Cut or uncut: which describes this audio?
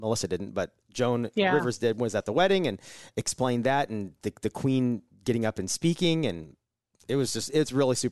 uncut